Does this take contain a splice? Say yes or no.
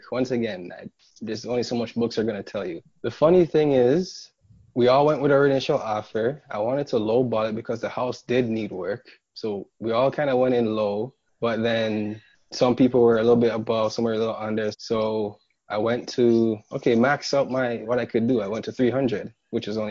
yes